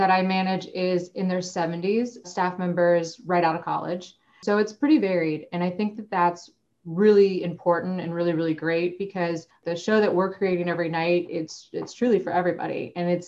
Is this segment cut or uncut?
cut